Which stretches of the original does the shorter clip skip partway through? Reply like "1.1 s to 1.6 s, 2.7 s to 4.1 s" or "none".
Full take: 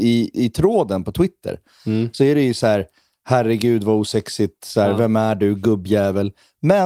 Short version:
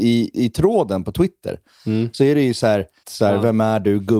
3.0 s to 4.6 s